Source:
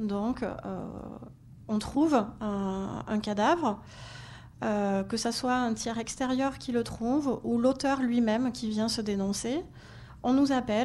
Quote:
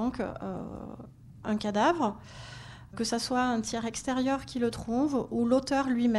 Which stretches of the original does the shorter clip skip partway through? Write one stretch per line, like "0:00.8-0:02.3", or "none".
0:01.7-0:03.1
0:04.6-0:05.1